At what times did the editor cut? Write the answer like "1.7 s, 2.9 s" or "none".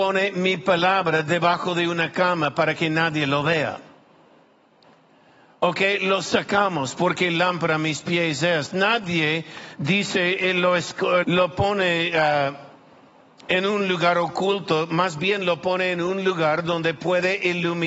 11.2 s